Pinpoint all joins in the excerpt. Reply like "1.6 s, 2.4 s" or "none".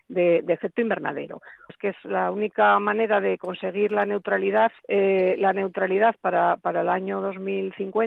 1.7 s, 4.8 s